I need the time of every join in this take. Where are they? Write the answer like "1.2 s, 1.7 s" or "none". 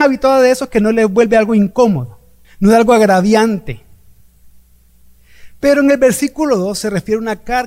2.4 s